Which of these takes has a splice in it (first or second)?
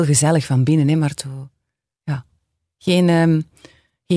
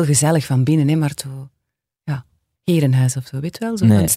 second